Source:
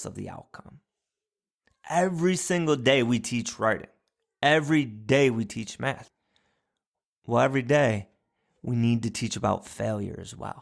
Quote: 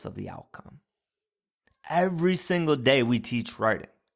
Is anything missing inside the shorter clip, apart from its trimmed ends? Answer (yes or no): no